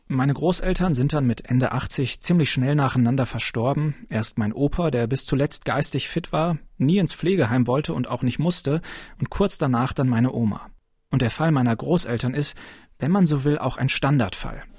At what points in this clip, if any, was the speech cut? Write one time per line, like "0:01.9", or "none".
none